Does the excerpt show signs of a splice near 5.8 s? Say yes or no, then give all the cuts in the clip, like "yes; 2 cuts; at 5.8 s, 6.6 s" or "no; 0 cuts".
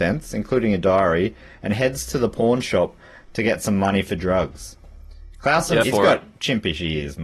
yes; 1 cut; at 5.8 s